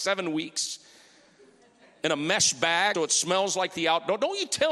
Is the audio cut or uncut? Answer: cut